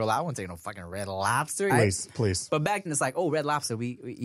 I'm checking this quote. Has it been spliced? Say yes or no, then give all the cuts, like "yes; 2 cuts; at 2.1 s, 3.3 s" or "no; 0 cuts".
yes; 2 cuts; at 1.7 s, 2.9 s